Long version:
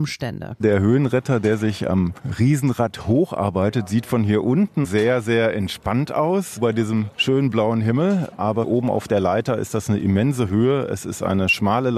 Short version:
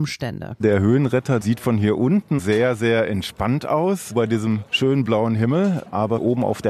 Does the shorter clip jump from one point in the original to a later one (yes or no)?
yes